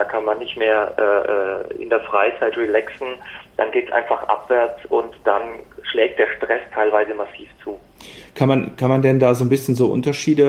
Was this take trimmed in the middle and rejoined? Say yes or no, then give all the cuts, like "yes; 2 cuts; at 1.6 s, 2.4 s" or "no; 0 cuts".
no; 0 cuts